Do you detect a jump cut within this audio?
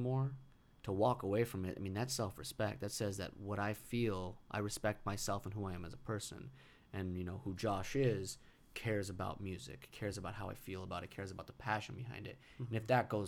no; 0 cuts

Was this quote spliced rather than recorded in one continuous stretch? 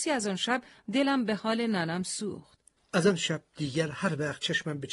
yes; 1 cut; at 2.8 s

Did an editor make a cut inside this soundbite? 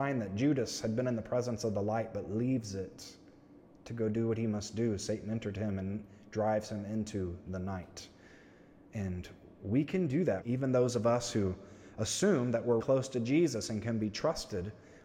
yes; 2 cuts; at 10.4 s, 12.8 s

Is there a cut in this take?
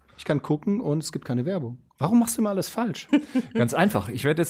yes; 2 cuts; at 1.9 s, 3.1 s

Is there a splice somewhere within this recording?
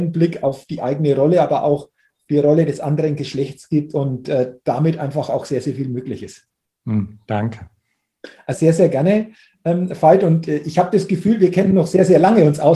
yes; 1 cut; at 8.5 s

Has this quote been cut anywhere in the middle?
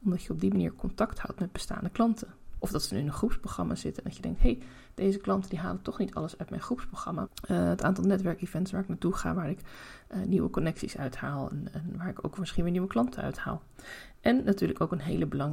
yes; 2 cuts; at 2.6 s, 7.3 s

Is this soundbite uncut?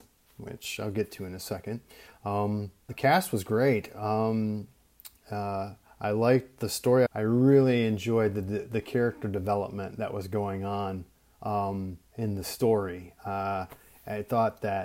no; 3 cuts; at 2.9 s, 7.1 s, 12.1 s

